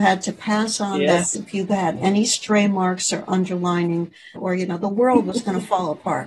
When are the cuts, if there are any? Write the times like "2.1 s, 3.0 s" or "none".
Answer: 1.3 s, 4.4 s